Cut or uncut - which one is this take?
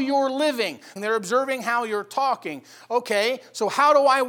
cut